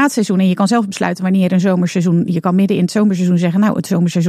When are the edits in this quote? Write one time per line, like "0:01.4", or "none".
none